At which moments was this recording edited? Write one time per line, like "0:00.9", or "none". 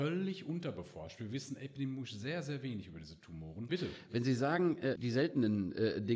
0:03.7
0:05.0